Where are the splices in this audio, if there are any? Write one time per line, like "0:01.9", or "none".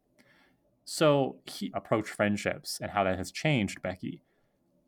0:01.7

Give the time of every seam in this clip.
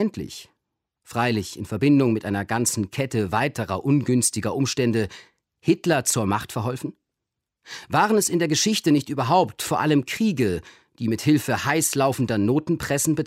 none

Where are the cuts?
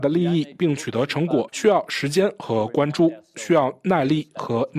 0:01.5

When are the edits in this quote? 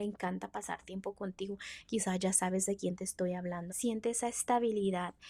0:01.8
0:03.7

